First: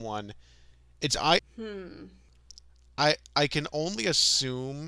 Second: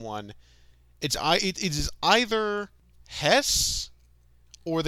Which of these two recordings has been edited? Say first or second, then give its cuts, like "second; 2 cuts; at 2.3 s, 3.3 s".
first; 1 cut; at 1.4 s